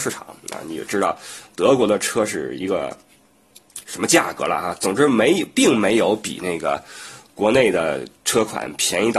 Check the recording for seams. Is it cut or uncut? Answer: uncut